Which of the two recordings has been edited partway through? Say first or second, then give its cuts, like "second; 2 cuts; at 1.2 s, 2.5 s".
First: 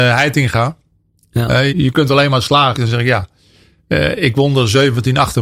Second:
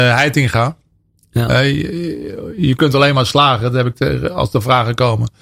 first; 2 cuts; at 1.7 s, 2.7 s